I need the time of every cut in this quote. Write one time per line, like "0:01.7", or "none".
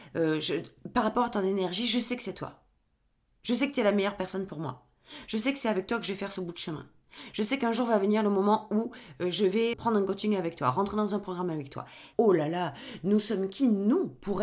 0:09.7
0:12.1